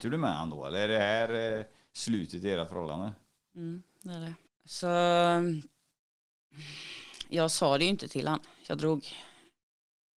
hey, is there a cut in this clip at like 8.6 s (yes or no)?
no